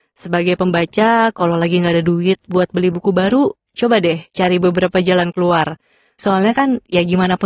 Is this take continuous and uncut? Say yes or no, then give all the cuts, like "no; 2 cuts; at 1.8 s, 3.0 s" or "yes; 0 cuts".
no; 1 cut; at 6.2 s